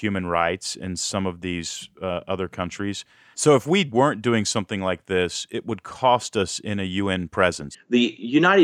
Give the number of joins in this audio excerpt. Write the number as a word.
two